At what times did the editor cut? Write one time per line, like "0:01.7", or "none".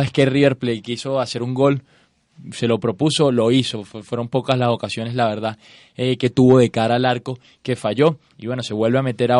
none